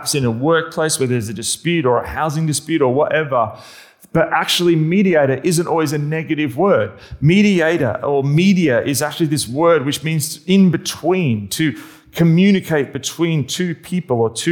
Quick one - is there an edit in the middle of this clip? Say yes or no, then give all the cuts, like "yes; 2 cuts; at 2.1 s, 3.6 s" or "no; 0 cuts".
no; 0 cuts